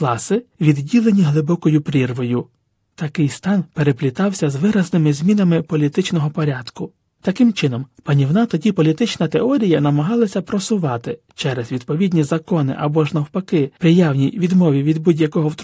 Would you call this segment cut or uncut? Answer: uncut